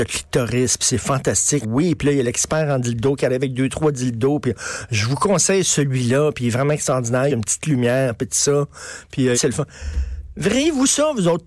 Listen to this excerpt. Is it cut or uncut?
cut